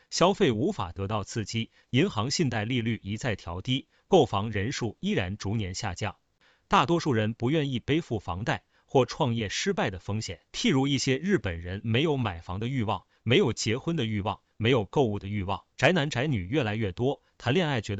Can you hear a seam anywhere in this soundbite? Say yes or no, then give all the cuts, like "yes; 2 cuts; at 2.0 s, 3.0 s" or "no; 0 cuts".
yes; 2 cuts; at 10.5 s, 15.7 s